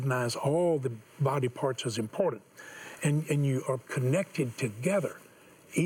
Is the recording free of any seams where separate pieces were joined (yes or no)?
yes